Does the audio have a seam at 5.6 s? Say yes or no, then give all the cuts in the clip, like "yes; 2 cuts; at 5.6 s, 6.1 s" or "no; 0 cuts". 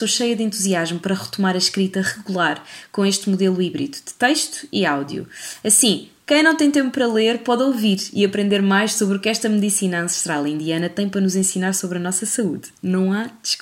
no; 0 cuts